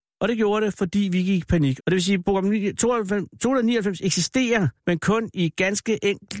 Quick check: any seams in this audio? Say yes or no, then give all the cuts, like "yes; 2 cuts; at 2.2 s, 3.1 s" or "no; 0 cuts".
yes; 2 cuts; at 1.8 s, 4.8 s